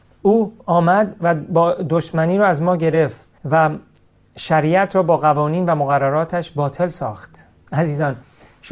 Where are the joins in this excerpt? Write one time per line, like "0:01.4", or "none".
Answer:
0:03.4